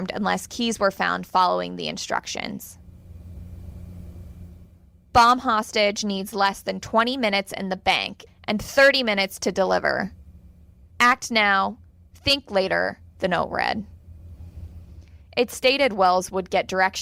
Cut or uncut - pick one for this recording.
cut